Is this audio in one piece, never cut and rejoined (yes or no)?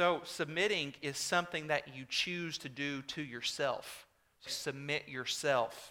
no